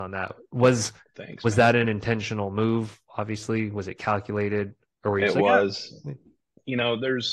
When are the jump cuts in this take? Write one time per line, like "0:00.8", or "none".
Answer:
none